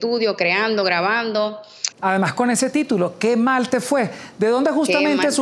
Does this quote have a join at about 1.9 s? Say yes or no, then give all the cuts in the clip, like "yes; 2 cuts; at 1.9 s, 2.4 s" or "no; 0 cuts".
yes; 1 cut; at 1.9 s